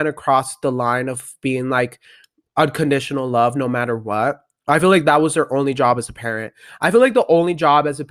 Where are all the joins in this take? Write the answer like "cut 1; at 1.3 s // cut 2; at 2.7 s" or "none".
none